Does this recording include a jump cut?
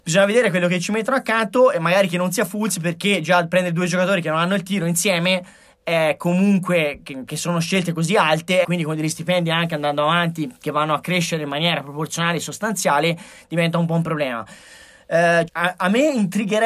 yes; 2 cuts; at 8.6 s, 15.5 s

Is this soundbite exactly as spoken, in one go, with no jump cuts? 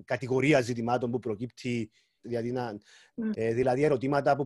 no; 2 cuts; at 2.2 s, 3.3 s

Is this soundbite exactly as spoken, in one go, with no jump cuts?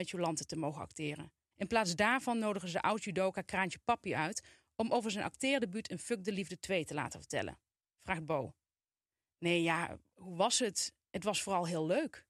no; 2 cuts; at 1.5 s, 7.8 s

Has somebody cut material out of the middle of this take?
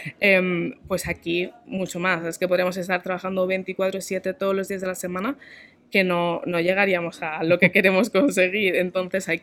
no; 0 cuts

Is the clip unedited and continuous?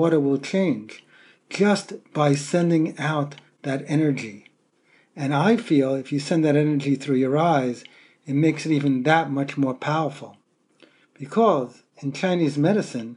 yes; 0 cuts

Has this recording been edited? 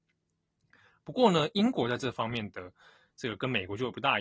no; 0 cuts

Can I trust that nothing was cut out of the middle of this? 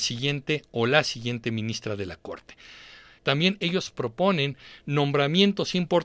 no; 1 cut; at 3.2 s

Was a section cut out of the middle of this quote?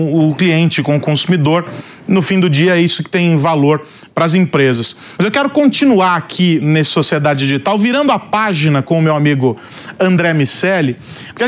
yes; 1 cut; at 5.2 s

